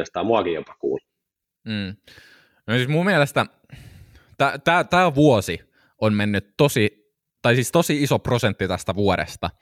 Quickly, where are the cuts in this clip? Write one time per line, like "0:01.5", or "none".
none

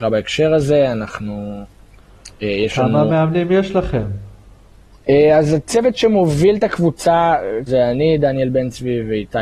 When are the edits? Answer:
0:07.7

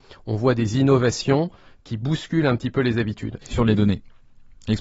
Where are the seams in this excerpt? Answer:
0:03.4

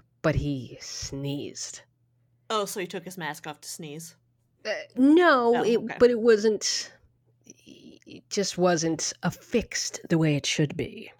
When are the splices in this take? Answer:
none

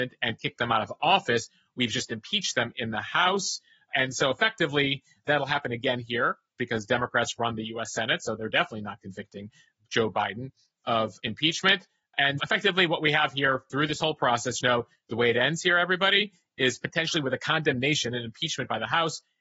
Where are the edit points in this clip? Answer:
0:12.4
0:14.6

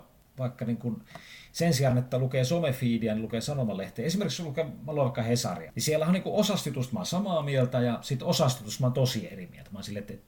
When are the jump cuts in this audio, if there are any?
none

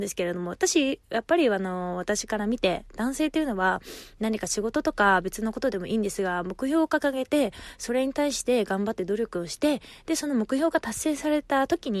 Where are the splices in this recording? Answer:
none

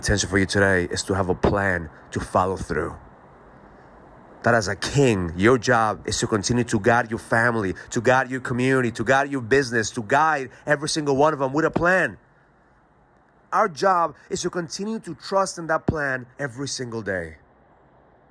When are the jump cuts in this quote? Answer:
0:13.5
0:16.3

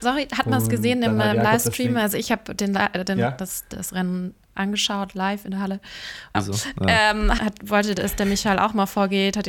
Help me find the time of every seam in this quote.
0:06.3
0:07.4

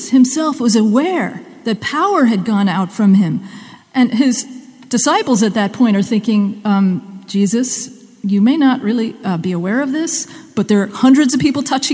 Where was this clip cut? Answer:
0:03.8

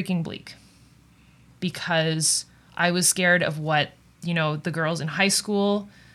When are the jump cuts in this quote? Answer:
none

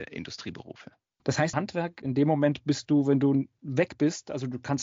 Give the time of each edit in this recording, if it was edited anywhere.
0:01.5

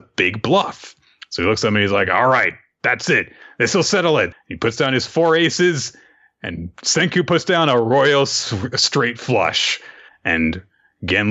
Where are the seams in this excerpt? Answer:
0:04.3
0:10.1

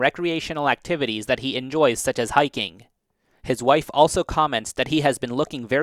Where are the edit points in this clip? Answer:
none

